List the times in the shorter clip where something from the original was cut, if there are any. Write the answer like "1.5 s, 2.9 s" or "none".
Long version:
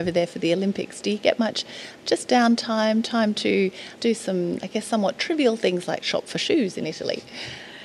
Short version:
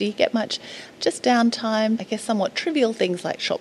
2.0 s